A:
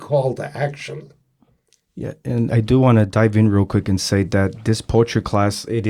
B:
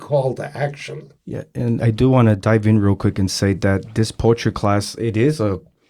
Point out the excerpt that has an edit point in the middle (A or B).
B